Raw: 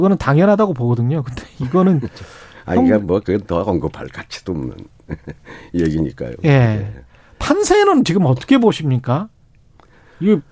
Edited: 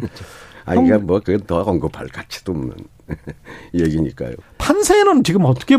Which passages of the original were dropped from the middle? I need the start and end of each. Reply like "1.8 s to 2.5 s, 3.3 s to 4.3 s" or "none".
6.4 s to 7.2 s